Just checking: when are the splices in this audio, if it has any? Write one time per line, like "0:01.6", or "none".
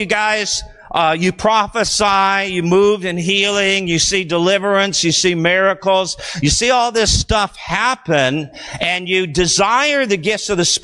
none